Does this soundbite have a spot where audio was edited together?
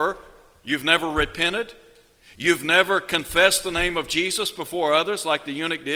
no; 0 cuts

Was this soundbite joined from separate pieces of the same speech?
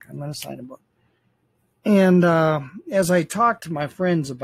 no; 0 cuts

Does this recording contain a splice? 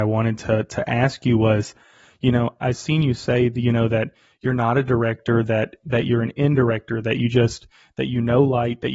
no; 0 cuts

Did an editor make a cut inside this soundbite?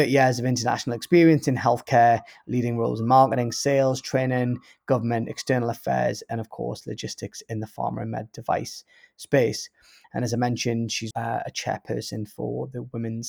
yes; 2 cuts; at 10.0 s, 11.1 s

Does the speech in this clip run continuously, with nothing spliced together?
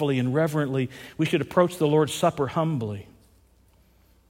yes; 0 cuts

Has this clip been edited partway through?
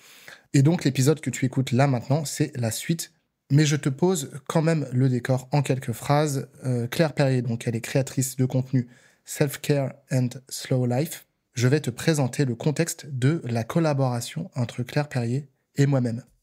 yes; 1 cut; at 11.5 s

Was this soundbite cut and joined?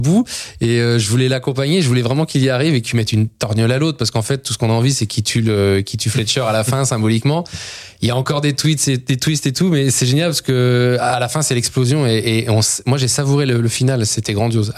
no; 0 cuts

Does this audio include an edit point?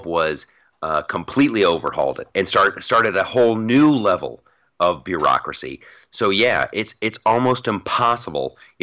no; 0 cuts

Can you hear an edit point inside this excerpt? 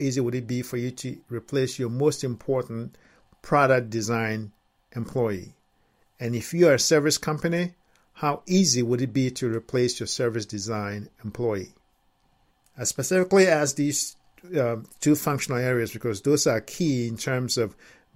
no; 0 cuts

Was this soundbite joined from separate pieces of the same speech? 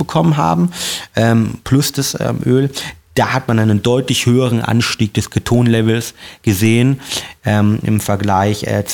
no; 0 cuts

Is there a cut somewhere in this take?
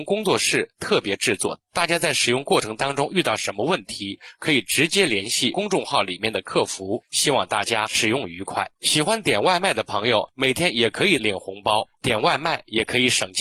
no; 0 cuts

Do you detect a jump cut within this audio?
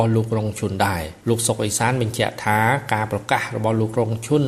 yes; 1 cut; at 1.2 s

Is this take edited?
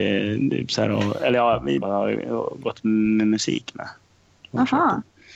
yes; 1 cut; at 1.8 s

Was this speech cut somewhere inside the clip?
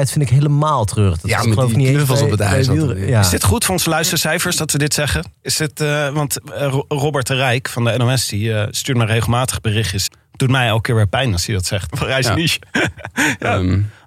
yes; 2 cuts; at 10.1 s, 11.9 s

